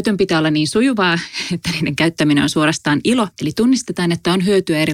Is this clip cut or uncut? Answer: cut